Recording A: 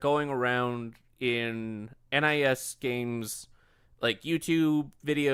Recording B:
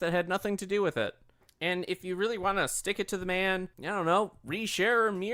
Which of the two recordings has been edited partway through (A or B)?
B